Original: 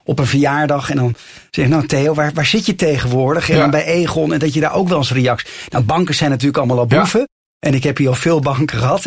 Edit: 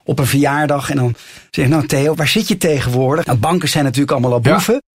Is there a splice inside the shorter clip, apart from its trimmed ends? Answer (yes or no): yes